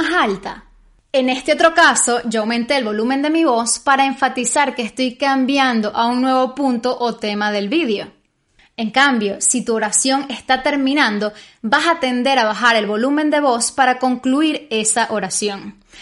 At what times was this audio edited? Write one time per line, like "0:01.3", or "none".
none